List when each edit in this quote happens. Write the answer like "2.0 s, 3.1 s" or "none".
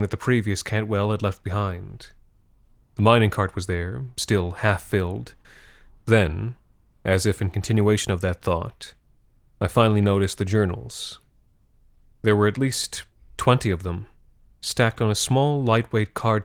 6.0 s